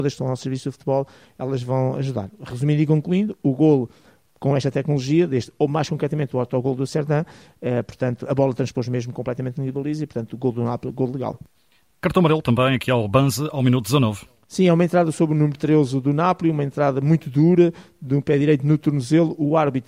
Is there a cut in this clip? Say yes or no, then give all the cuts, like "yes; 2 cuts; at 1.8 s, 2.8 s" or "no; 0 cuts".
no; 0 cuts